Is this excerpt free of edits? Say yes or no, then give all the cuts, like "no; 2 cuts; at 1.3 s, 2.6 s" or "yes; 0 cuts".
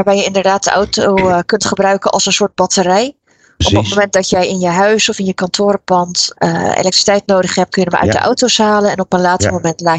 no; 2 cuts; at 6.3 s, 7.7 s